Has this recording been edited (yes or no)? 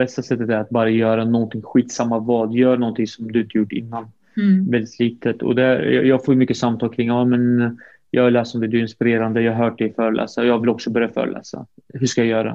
no